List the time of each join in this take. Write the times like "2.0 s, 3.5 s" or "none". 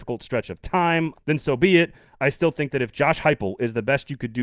1.1 s